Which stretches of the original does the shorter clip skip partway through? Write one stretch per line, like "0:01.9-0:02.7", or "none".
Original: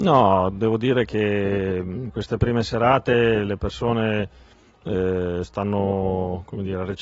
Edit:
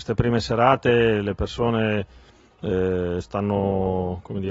none